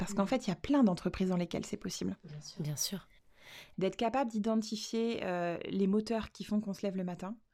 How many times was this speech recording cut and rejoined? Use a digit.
1